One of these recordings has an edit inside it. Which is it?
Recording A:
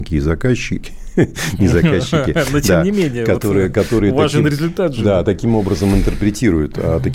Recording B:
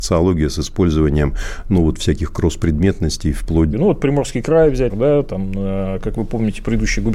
B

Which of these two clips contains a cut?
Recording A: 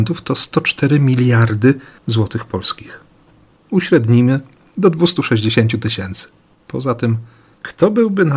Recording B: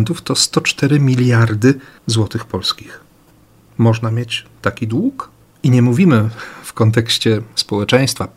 A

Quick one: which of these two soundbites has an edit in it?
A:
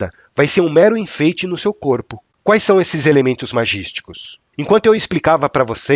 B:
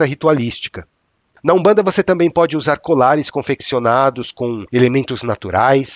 A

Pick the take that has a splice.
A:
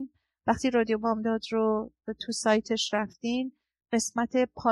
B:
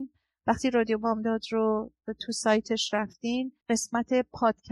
B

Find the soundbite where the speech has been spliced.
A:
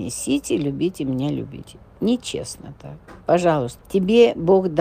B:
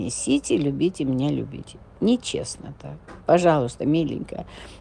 A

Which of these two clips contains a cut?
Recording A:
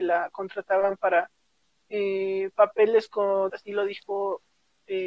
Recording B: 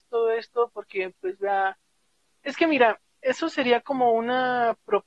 A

